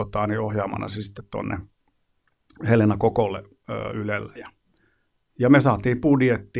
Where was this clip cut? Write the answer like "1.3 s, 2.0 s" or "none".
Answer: 4.4 s